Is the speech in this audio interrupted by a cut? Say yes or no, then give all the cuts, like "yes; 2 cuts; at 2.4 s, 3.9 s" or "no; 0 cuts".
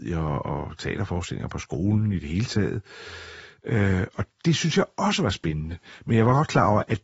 no; 0 cuts